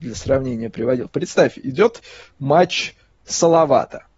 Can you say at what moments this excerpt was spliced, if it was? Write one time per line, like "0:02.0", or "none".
none

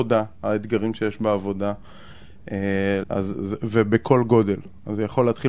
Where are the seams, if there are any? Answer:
0:03.0

